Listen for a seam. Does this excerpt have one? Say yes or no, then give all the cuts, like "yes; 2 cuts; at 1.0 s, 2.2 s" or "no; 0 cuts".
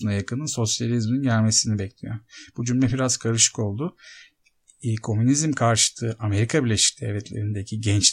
no; 0 cuts